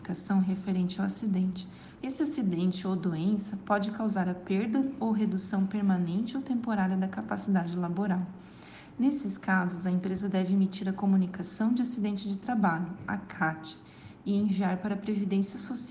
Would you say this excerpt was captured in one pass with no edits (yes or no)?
no